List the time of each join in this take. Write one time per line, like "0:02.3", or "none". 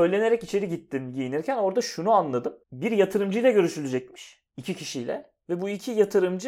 0:02.6